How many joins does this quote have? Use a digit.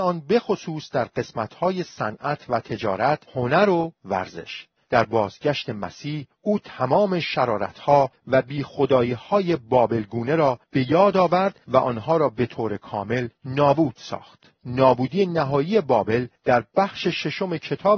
2